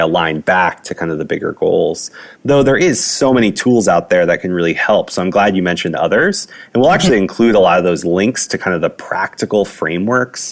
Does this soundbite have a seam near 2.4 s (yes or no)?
no